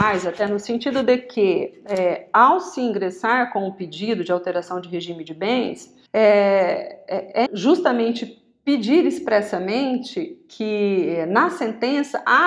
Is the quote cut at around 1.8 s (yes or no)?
no